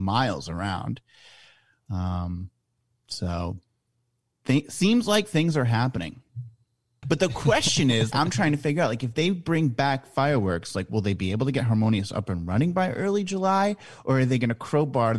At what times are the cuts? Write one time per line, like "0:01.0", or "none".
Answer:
0:07.0
0:08.1

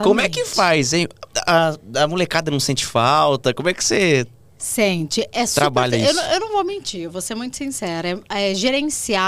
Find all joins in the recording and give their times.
none

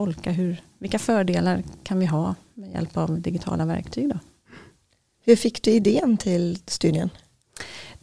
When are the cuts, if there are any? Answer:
none

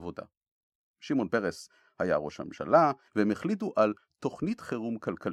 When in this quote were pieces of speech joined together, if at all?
0:03.1

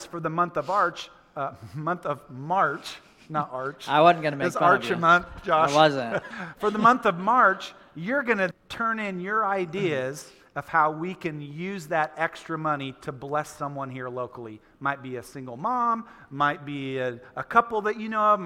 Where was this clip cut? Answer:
0:06.3
0:08.5

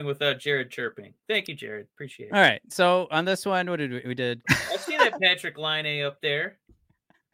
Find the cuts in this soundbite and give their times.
0:04.4

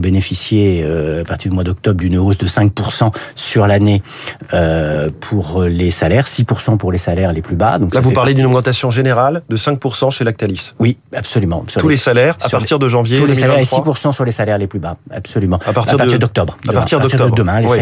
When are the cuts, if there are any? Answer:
none

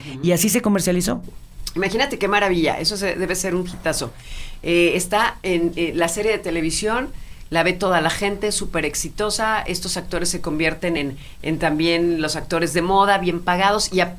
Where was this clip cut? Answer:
none

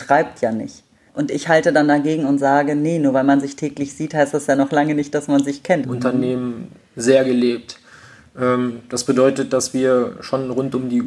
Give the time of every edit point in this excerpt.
0:01.1
0:05.8

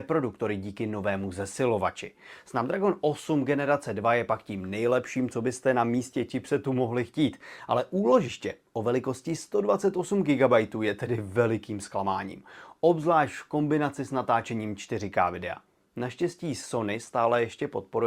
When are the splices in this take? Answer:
none

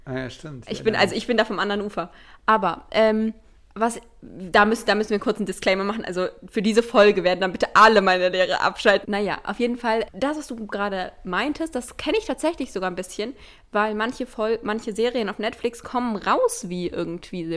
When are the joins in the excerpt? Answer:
0:09.0
0:10.1

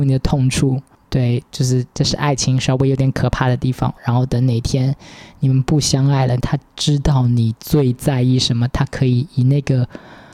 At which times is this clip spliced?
0:01.9
0:04.0
0:06.4

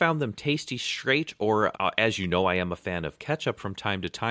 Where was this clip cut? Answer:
0:01.7

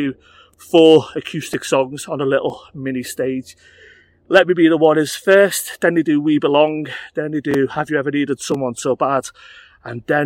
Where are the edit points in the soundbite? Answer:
none

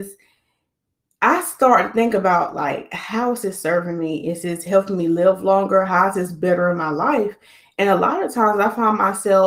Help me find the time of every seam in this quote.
none

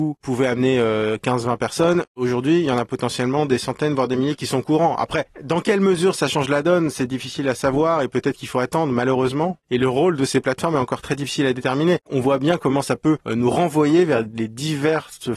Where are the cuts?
0:12.0

